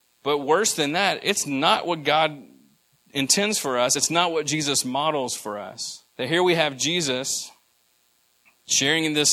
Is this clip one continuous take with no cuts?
no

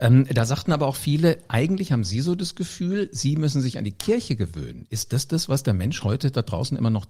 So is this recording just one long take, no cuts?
yes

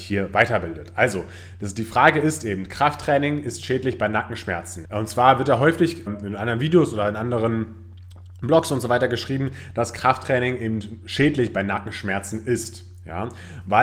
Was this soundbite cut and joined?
yes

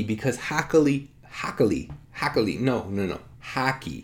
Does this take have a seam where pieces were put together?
no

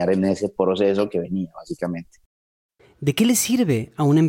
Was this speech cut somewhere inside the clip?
yes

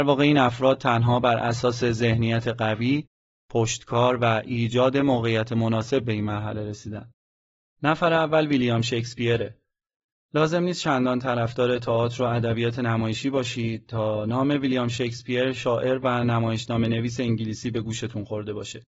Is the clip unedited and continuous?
yes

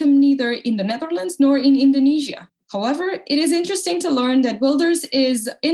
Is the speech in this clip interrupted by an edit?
yes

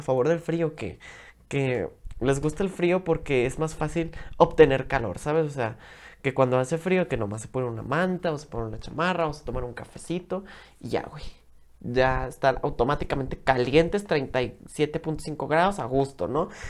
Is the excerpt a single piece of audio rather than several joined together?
yes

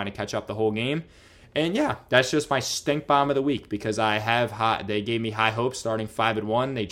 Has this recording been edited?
no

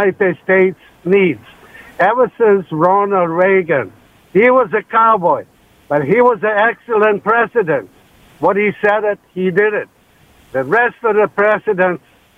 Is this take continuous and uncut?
yes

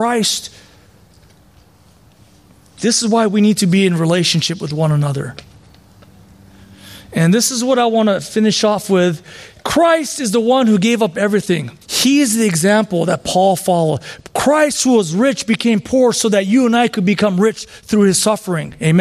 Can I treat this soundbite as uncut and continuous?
no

